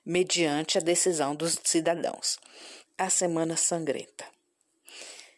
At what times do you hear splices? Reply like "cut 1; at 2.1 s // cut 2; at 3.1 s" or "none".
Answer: cut 1; at 2.9 s